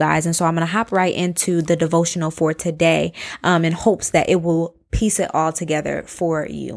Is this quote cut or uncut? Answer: uncut